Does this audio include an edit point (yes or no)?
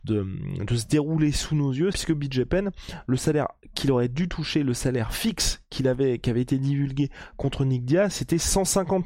yes